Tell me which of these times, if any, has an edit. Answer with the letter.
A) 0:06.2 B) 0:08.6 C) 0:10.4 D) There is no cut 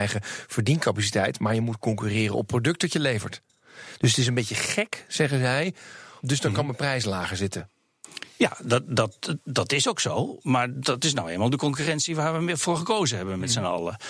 A